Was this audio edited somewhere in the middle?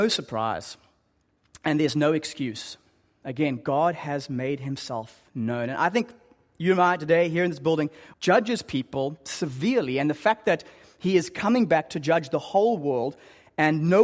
yes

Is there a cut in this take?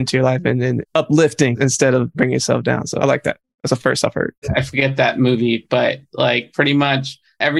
yes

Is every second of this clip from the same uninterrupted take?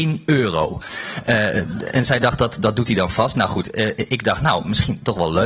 yes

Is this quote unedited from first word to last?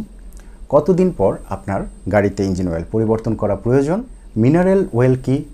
no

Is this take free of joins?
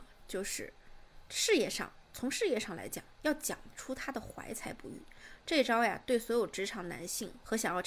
yes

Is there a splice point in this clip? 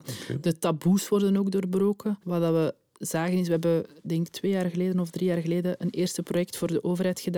yes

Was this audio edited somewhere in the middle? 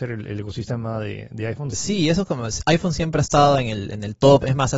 yes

